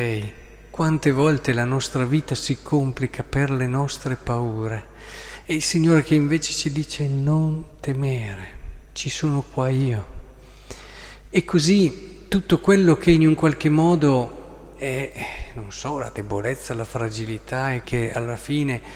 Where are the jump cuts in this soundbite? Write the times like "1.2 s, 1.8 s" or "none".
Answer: 17.8 s